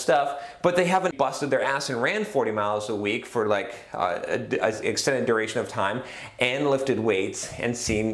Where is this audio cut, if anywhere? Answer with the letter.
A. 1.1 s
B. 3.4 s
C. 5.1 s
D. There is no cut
A